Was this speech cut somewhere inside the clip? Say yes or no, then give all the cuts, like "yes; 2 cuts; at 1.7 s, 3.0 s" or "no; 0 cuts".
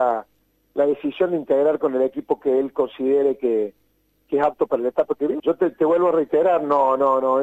yes; 1 cut; at 5.4 s